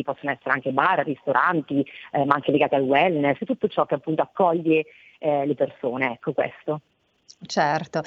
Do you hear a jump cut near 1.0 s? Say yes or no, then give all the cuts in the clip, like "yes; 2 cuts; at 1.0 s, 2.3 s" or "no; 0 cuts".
no; 1 cut; at 3.4 s